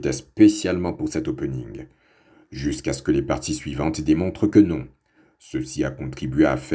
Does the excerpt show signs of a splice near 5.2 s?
no; 0 cuts

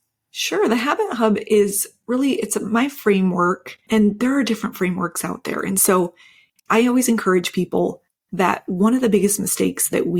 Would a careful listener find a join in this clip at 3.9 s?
yes; 1 cut; at 3.9 s

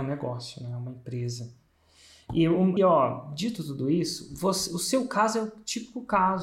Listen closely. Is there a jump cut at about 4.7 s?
no; 1 cut; at 2.8 s

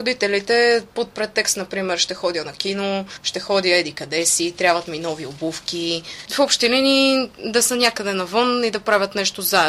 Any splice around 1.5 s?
no; 1 cut; at 6.2 s

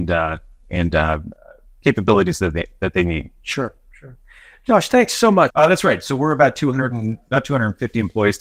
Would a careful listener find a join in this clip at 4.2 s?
no; 1 cut; at 5.5 s

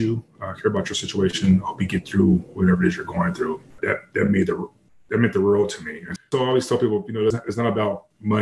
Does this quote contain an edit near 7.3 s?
yes; 2 cuts; at 6.2 s, 7.3 s

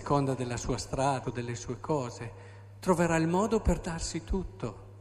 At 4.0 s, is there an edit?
no; 1 cut; at 1.2 s

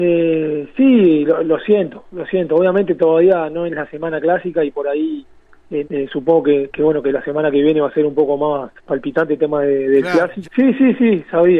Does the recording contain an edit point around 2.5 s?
no; 2 cuts; at 5.8 s, 10.4 s

